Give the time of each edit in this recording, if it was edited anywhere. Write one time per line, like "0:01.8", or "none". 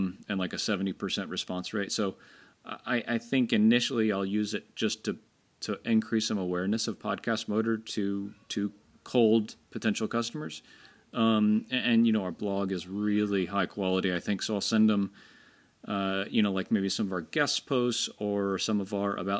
0:01.9